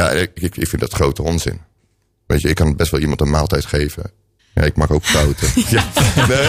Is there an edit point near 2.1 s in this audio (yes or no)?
no